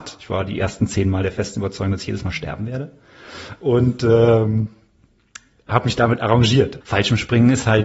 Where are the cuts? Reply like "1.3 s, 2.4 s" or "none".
6.8 s